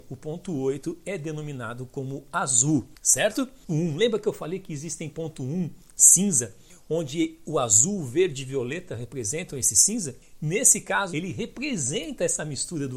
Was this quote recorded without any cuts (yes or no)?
no